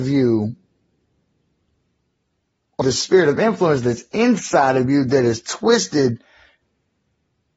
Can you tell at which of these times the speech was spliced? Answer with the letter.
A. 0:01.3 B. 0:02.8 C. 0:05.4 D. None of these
B